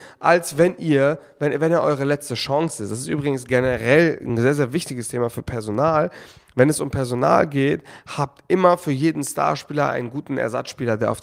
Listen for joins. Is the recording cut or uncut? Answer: uncut